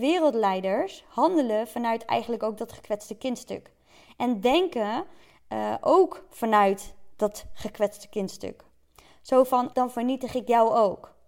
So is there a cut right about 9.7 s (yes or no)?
yes